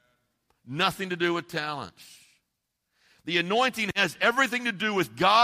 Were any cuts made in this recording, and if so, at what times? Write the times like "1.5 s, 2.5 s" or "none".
none